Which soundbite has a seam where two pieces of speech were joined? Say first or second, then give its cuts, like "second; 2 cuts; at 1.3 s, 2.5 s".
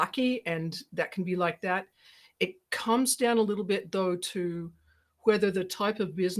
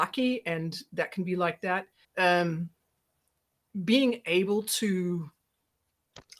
second; 1 cut; at 2.0 s